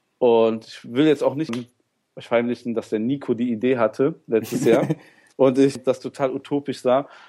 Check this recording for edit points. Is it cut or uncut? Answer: cut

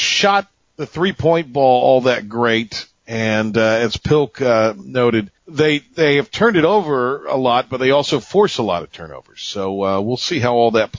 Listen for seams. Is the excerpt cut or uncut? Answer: cut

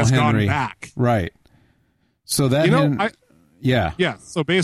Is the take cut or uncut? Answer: uncut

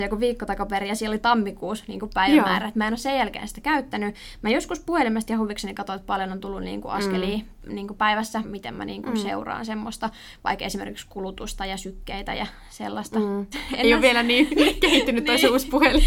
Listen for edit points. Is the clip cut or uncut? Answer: cut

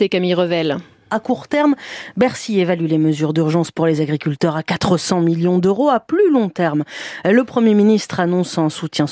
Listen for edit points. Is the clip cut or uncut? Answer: uncut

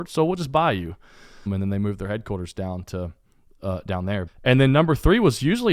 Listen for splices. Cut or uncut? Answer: cut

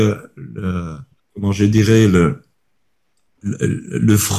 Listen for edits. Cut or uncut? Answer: cut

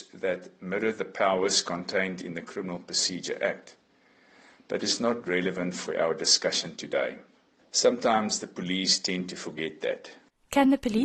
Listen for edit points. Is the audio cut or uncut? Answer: cut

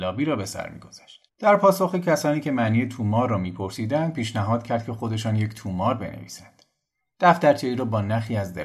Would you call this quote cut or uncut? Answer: cut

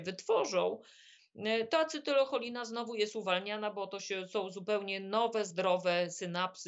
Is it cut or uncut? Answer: uncut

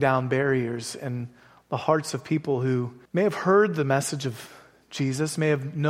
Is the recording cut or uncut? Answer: cut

